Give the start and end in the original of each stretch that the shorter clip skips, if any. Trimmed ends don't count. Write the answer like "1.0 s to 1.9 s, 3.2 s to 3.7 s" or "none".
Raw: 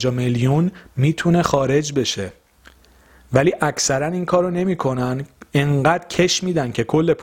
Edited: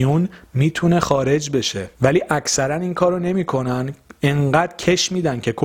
2.4 s to 3.3 s